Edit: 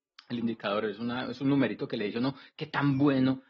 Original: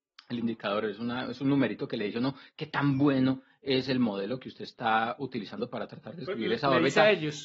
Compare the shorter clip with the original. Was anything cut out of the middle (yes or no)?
no